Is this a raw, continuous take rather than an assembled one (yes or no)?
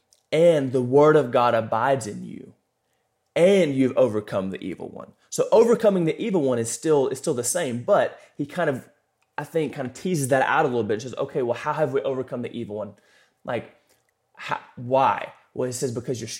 yes